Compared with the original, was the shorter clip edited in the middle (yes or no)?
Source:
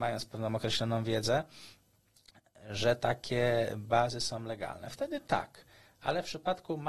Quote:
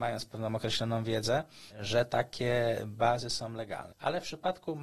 yes